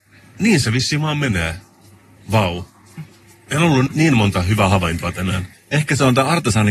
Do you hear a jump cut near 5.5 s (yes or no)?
yes